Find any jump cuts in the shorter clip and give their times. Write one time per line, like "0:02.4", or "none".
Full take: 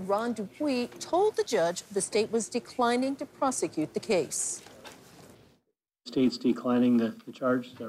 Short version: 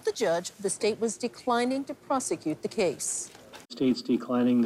0:03.6

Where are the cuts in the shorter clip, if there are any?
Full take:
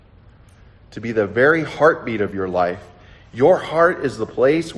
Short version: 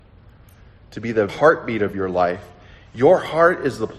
0:01.3

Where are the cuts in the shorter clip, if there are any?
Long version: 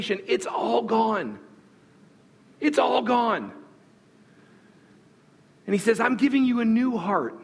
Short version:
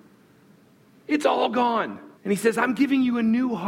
0:02.2

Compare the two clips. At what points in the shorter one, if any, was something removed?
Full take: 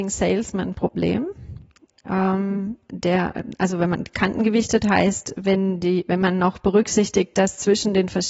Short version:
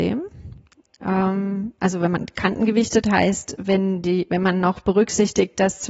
0:01.8

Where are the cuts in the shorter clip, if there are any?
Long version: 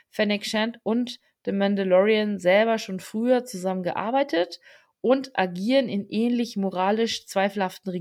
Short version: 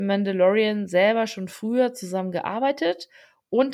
none

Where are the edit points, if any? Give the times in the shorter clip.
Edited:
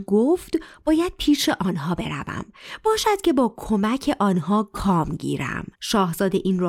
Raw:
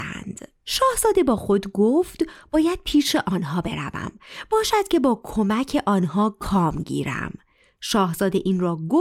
0:05.7

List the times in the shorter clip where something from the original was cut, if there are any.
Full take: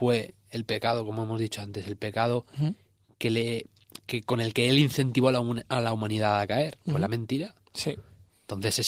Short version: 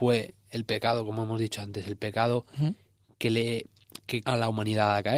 0:04.2

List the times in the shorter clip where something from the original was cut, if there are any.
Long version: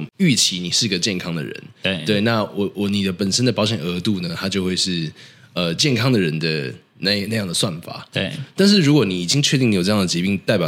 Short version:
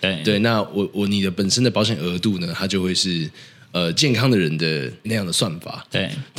0:05.0

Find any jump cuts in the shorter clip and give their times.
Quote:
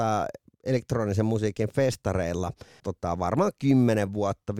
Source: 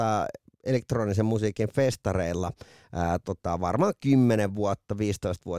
0:02.8

